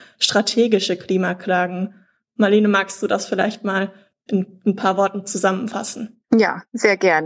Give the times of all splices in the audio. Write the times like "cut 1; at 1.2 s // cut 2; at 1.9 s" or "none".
none